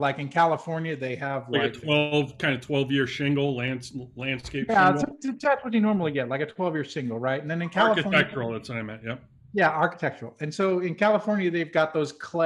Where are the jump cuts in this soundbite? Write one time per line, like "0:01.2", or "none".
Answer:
none